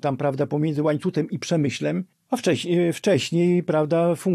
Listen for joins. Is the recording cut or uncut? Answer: uncut